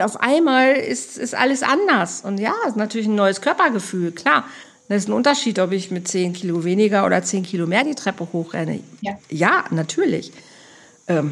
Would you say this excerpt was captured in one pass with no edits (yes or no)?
yes